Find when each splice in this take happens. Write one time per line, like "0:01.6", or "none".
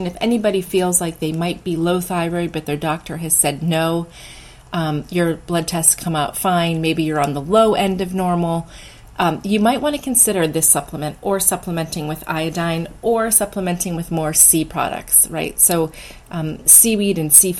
none